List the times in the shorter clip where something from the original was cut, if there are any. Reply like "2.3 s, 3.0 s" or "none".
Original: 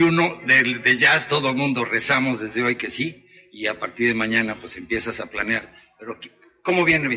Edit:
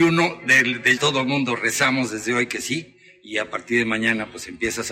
1.0 s